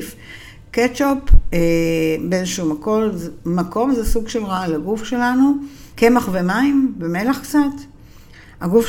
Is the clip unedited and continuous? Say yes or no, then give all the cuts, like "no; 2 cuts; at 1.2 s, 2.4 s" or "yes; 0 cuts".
no; 1 cut; at 5.9 s